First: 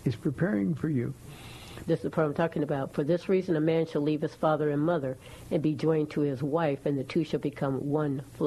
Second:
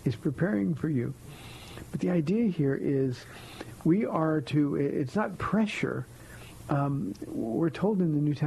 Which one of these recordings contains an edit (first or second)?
first